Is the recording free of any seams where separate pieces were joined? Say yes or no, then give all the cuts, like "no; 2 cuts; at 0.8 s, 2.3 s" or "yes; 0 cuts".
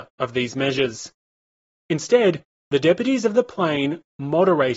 yes; 0 cuts